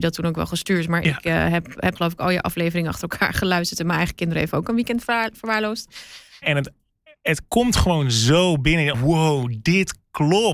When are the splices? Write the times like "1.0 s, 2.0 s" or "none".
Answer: 2.0 s, 6.4 s, 8.9 s

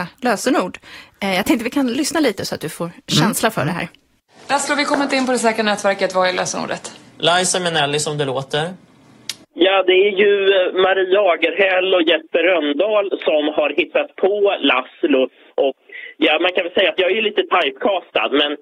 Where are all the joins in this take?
9.4 s

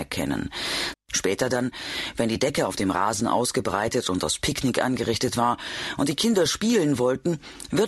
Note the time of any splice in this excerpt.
0.9 s

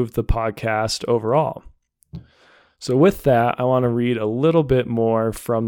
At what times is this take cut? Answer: none

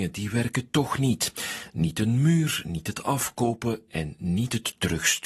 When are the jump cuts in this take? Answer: none

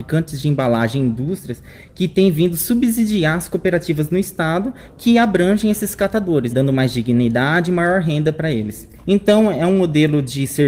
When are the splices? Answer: 6.5 s, 9.0 s

